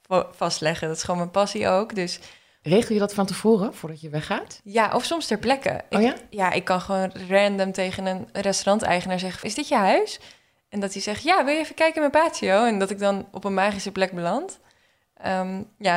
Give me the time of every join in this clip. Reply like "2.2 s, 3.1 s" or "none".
9.4 s